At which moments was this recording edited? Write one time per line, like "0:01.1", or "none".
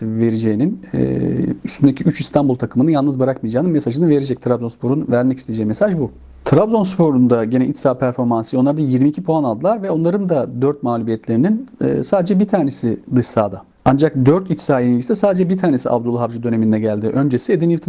0:06.4